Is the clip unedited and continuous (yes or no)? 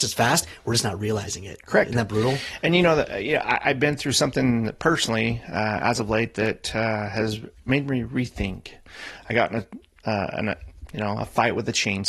yes